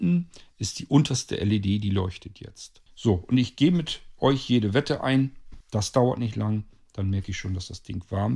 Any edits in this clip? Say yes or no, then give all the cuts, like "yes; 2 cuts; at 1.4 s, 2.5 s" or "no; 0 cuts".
yes; 2 cuts; at 2.9 s, 5.6 s